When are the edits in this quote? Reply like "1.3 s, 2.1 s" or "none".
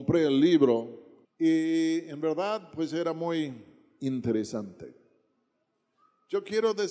1.3 s